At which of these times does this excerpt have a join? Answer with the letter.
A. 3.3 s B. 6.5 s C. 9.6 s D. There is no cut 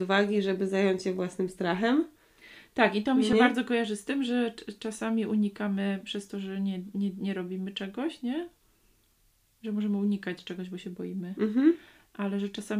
D